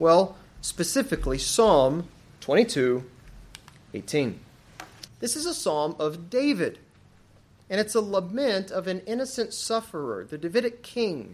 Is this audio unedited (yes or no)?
no